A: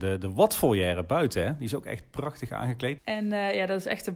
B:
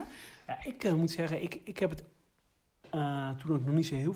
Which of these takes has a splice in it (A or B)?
A